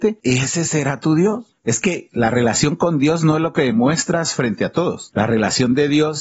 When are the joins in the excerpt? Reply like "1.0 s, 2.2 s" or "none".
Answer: 1.6 s